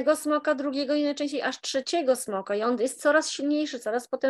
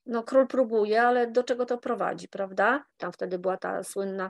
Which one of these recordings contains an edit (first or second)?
second